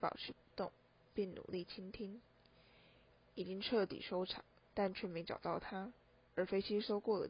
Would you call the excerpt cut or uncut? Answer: cut